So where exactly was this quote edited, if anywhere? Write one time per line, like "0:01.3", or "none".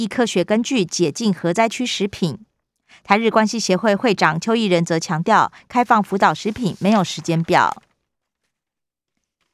none